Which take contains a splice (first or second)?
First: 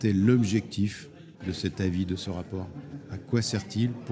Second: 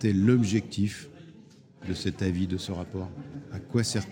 first